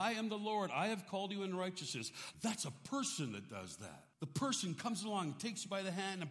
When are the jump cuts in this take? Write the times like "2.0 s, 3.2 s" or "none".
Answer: 2.3 s, 4.1 s